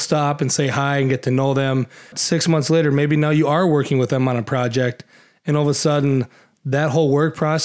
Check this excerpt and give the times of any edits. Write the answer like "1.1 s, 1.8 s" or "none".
2.1 s